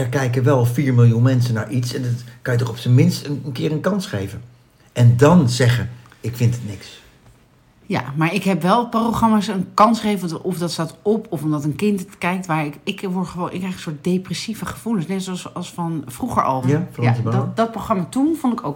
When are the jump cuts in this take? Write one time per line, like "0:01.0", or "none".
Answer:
0:16.6